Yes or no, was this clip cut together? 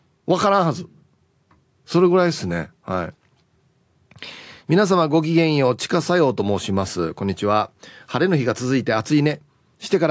no